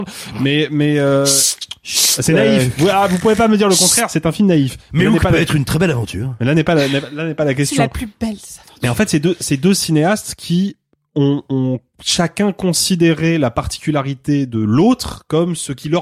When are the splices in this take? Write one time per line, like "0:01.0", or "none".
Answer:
none